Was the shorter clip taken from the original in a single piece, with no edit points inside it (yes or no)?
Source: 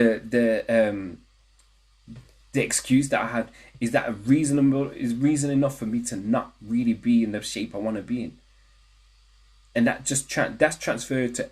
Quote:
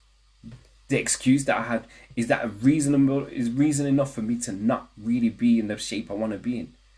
yes